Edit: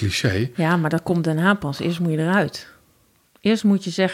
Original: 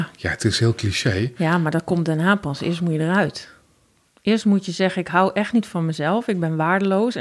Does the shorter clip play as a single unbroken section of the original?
yes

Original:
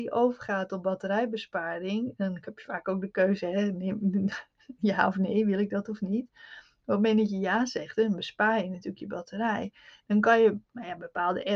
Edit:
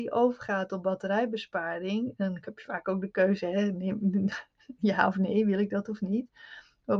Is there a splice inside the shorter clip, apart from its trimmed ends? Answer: no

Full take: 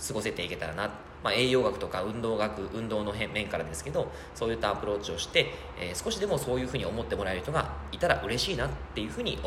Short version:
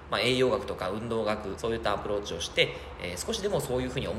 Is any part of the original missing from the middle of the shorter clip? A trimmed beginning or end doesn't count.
yes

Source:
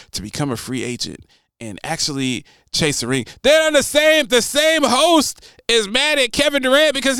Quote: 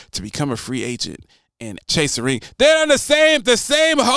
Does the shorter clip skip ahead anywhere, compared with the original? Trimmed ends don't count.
yes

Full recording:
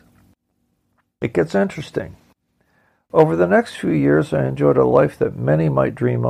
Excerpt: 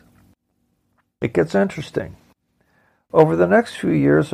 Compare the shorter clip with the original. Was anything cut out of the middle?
no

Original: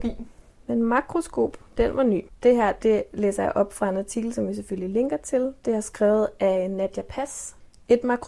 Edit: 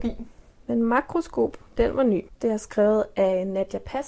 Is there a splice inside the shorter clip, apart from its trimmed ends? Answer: yes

